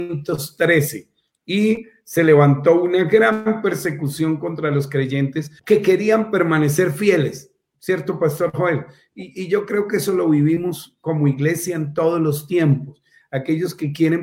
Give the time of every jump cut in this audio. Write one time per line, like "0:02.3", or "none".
0:05.6